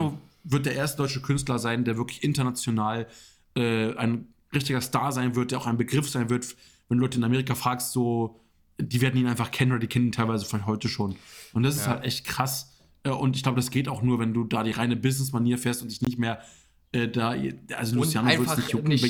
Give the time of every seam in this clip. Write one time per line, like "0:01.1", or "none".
none